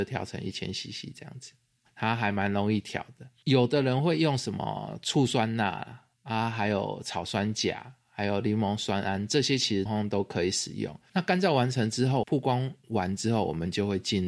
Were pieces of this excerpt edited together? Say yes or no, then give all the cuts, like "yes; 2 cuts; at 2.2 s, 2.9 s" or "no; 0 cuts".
yes; 3 cuts; at 9.9 s, 11.1 s, 12.2 s